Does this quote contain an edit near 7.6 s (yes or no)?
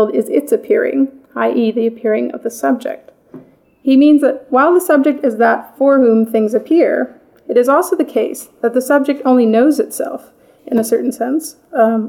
no